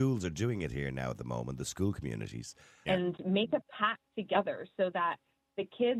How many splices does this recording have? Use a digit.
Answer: 2